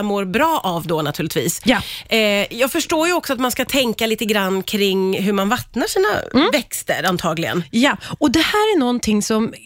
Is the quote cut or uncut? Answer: uncut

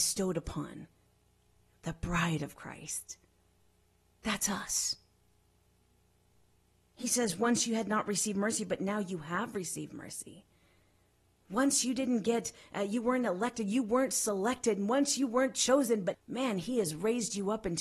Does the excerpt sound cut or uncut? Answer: cut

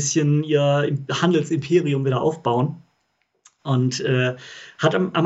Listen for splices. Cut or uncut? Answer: uncut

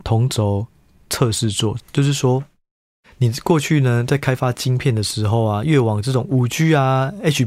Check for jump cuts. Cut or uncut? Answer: cut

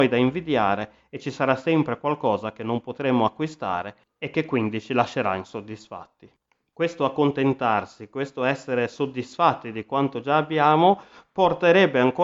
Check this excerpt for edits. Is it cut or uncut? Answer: uncut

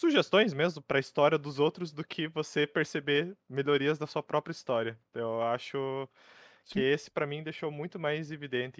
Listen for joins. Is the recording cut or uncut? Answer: uncut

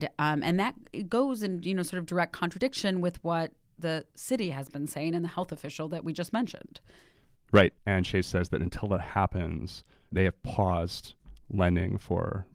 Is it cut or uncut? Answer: cut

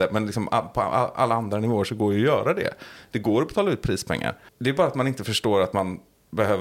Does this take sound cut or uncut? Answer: cut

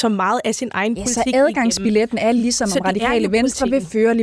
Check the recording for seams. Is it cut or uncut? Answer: uncut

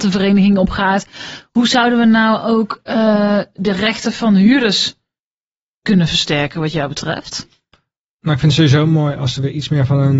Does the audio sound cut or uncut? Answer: uncut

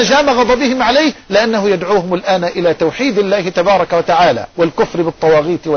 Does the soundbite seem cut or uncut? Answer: cut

